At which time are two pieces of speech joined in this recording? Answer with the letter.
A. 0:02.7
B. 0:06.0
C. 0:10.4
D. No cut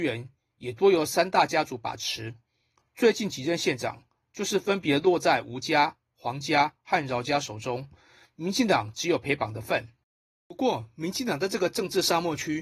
C